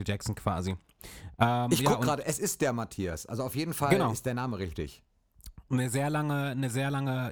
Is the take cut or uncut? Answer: uncut